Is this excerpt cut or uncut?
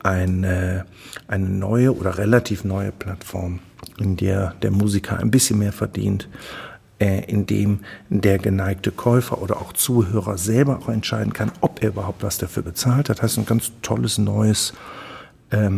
uncut